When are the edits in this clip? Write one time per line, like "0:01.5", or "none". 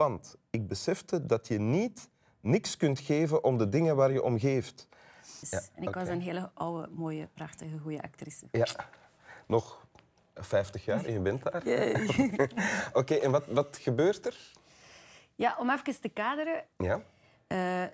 0:05.4
0:16.7